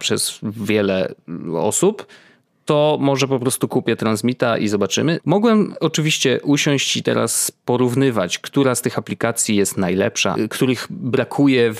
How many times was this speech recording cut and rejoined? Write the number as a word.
two